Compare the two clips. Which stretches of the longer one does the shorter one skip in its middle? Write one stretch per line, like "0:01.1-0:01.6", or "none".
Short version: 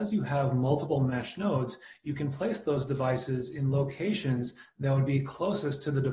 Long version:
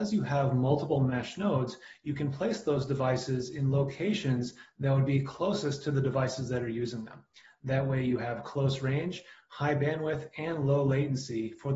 none